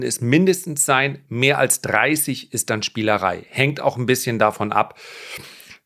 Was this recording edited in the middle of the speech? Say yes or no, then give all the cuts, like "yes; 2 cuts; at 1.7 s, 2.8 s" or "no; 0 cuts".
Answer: no; 0 cuts